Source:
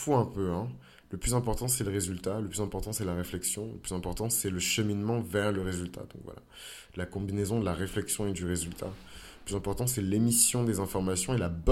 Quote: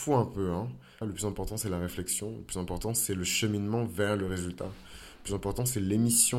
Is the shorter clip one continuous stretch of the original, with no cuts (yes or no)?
no